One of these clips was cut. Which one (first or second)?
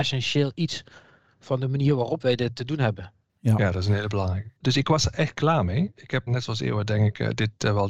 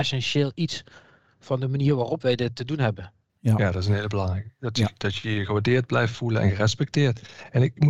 first